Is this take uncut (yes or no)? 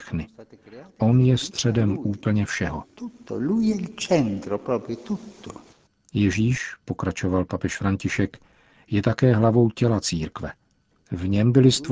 no